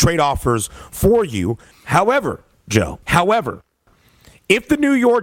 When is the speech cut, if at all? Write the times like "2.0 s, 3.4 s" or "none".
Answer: 1.7 s, 3.0 s